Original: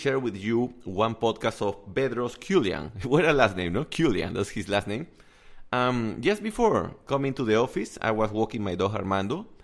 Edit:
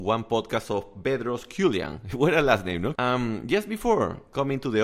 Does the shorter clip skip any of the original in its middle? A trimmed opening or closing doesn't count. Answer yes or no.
yes